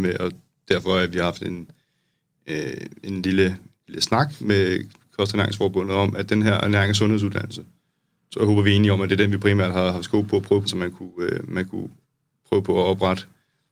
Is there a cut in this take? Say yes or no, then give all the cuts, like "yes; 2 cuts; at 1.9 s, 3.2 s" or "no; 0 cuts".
yes; 1 cut; at 10.7 s